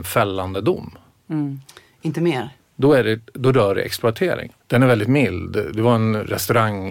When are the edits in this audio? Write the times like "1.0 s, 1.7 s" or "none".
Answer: 2.6 s, 4.6 s